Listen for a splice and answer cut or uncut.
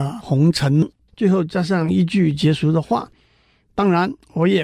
cut